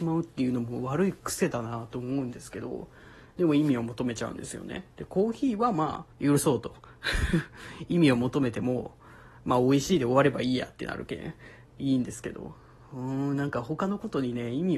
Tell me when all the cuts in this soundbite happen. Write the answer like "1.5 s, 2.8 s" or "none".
6.1 s